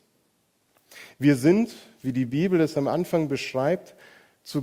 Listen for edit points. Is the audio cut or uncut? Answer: uncut